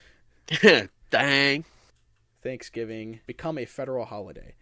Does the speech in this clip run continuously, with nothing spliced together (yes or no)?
no